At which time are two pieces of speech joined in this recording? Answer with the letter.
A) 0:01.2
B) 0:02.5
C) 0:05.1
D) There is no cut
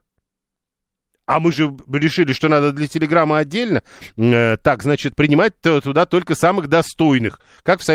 C